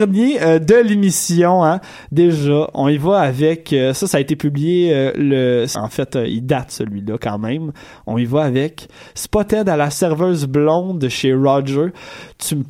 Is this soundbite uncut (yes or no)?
no